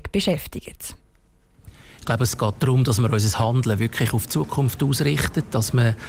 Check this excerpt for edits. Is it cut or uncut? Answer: uncut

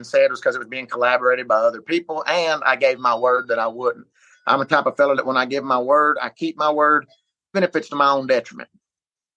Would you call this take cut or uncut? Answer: cut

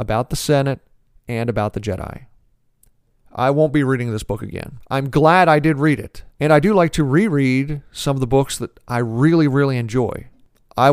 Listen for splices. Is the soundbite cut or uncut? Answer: cut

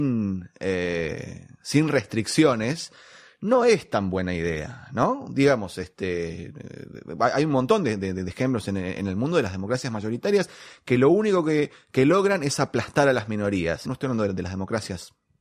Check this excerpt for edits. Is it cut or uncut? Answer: cut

